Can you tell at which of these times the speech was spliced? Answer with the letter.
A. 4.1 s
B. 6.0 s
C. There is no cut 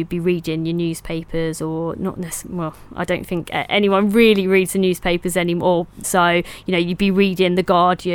B